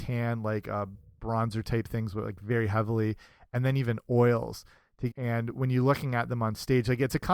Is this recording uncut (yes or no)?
no